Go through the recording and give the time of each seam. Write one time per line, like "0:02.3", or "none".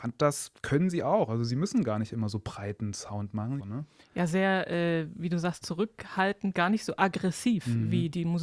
0:03.6